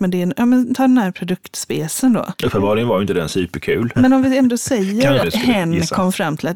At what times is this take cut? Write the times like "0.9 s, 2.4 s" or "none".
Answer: 2.3 s, 3.9 s, 5.2 s